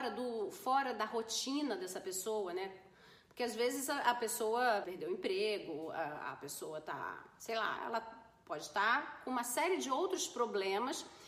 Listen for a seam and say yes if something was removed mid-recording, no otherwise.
yes